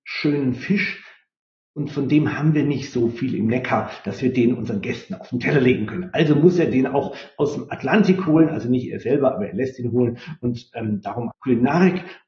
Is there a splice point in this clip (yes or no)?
yes